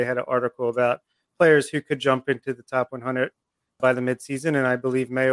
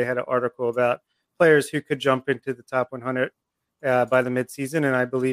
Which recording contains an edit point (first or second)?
first